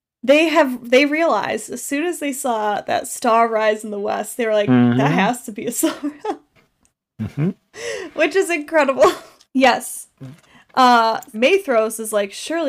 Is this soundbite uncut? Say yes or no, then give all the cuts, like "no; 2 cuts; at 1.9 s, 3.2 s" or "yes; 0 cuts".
no; 2 cuts; at 9.4 s, 11.3 s